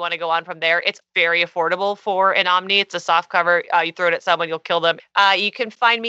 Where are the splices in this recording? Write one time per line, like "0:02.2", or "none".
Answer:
0:01.0
0:05.0